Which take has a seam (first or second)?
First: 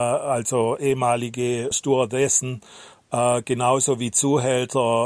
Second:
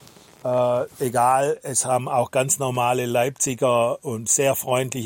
first